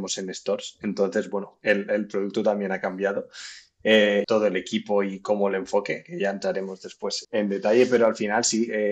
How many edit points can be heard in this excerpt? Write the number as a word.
two